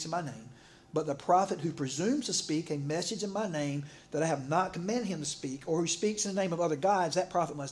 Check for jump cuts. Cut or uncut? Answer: uncut